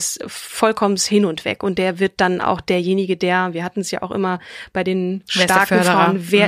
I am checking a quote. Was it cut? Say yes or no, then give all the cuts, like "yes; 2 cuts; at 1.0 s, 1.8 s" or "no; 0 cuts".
no; 0 cuts